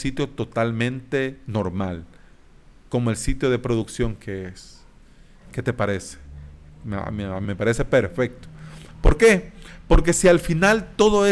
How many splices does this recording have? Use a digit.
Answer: 1